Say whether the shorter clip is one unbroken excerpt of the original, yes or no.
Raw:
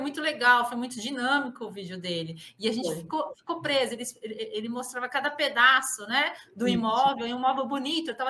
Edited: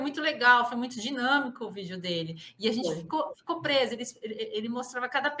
yes